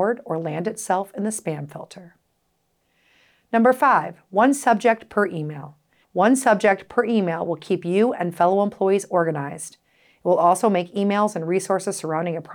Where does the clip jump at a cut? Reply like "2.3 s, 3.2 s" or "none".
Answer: 6.0 s